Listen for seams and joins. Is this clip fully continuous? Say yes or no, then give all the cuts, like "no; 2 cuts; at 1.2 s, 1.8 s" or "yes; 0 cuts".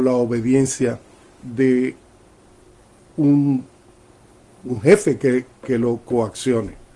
yes; 0 cuts